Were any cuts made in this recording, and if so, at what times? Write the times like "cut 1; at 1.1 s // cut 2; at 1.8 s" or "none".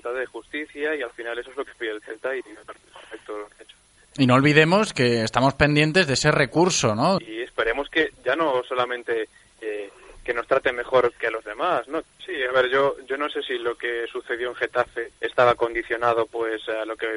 cut 1; at 7.2 s // cut 2; at 12.0 s // cut 3; at 15.2 s